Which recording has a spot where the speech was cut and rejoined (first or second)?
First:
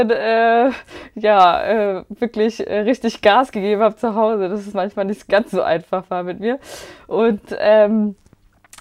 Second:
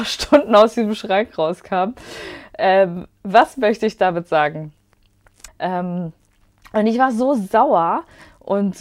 second